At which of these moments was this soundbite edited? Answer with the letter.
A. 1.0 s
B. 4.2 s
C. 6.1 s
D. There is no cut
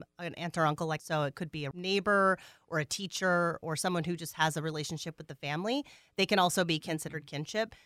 A